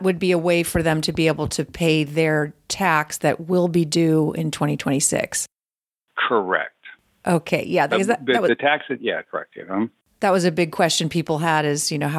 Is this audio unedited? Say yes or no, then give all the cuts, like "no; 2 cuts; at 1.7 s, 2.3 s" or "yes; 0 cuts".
yes; 0 cuts